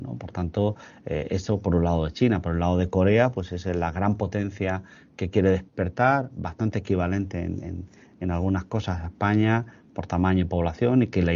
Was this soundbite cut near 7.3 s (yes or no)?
no